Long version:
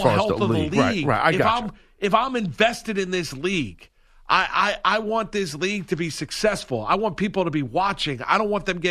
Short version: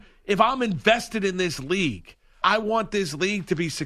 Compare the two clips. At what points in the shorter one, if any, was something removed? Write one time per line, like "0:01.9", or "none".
0:02.4